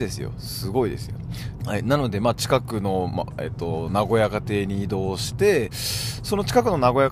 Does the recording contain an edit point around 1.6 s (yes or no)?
yes